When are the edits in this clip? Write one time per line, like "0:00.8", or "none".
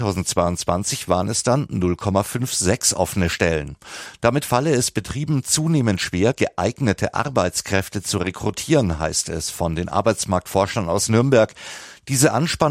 none